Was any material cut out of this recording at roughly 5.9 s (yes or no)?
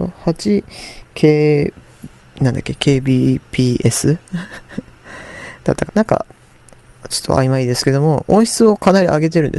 yes